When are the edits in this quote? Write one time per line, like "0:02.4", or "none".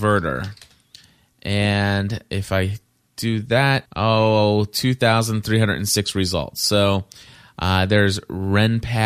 0:03.9

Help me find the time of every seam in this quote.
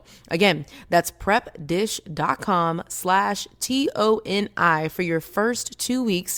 none

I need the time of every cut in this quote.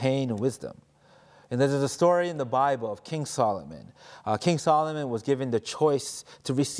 none

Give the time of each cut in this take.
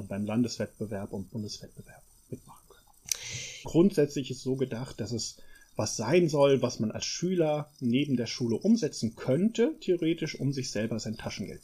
0:03.6

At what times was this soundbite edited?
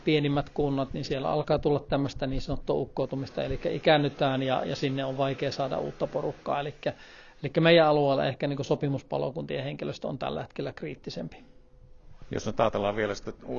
none

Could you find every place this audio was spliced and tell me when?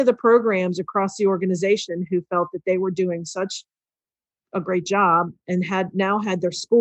none

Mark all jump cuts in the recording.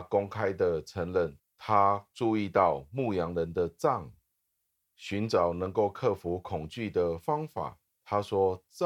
0:01.4

